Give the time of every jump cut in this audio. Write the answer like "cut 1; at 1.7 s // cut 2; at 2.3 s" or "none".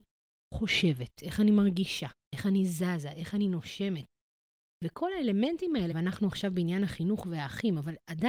cut 1; at 5.9 s